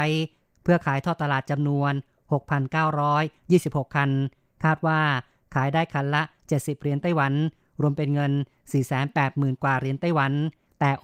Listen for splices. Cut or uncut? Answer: uncut